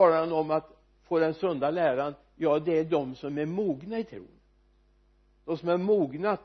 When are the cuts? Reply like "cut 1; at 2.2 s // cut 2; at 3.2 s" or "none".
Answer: none